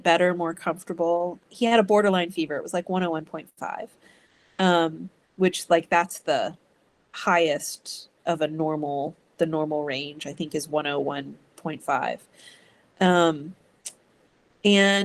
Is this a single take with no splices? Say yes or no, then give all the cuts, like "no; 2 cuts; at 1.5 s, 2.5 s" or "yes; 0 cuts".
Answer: no; 1 cut; at 1.4 s